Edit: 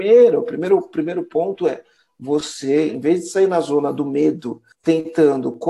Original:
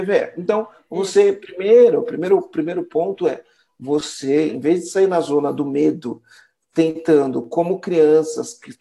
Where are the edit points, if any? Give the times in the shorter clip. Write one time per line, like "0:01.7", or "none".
0:04.7